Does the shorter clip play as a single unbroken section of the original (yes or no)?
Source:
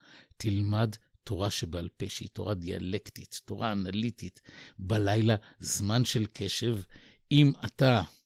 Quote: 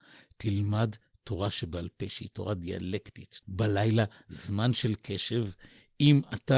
no